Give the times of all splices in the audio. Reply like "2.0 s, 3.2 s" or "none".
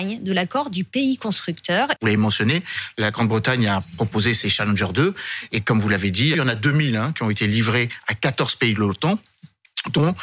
2.0 s, 6.3 s